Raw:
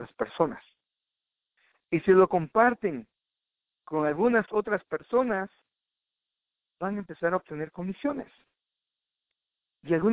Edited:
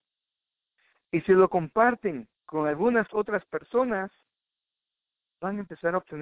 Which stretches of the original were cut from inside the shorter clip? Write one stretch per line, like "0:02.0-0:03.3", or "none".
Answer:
0:03.2-0:03.8